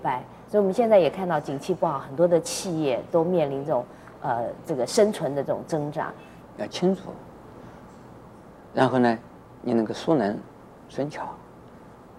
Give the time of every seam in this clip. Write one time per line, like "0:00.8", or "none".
0:06.4